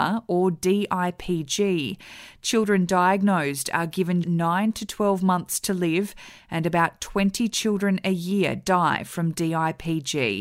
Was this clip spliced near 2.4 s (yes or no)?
no